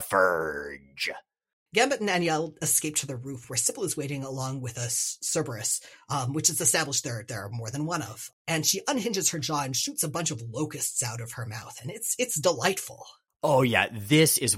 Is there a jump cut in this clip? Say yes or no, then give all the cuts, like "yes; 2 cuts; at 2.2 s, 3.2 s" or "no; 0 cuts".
no; 0 cuts